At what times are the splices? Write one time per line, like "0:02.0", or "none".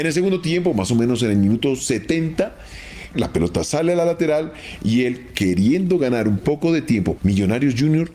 0:03.1
0:07.2

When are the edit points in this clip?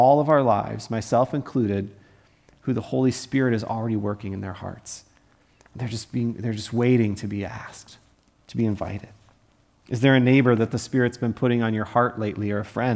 none

